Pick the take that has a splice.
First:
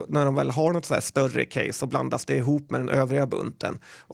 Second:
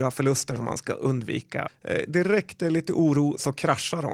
second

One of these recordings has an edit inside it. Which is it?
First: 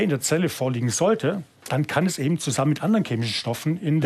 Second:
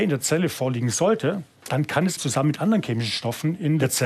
second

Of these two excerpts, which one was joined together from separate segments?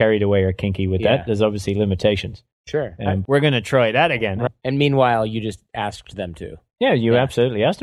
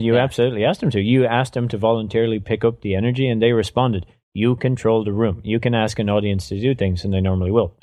first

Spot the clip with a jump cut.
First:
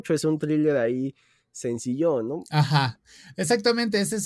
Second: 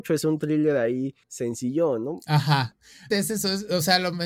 second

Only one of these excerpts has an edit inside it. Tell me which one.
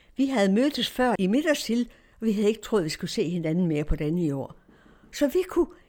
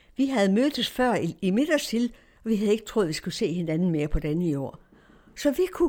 first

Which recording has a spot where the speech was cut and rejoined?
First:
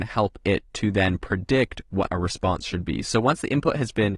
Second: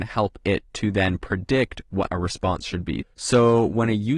second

